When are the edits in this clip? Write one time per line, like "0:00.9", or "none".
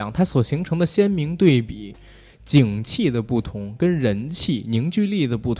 none